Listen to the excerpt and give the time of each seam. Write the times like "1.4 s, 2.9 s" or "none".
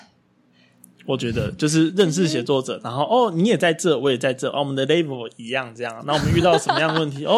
none